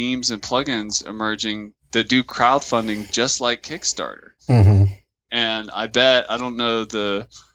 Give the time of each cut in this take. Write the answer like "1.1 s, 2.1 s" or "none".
none